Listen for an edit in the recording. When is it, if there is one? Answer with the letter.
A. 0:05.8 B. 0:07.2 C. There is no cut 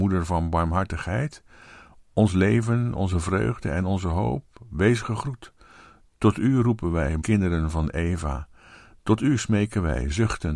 B